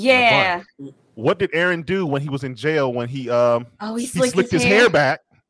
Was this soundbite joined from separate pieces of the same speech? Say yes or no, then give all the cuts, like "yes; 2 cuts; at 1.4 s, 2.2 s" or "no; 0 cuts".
no; 0 cuts